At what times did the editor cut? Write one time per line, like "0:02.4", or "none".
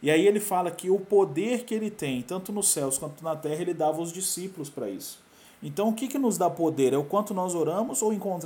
none